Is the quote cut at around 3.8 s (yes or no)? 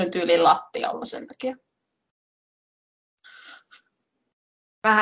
no